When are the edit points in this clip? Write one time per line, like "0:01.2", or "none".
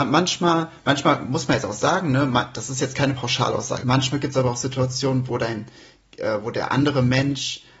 0:03.8